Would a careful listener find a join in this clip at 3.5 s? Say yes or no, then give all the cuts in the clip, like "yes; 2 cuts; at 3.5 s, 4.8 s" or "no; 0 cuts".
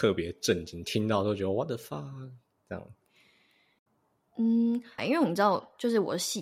no; 1 cut; at 5.0 s